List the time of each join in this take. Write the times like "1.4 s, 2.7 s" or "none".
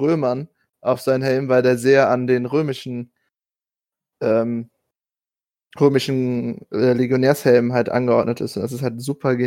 none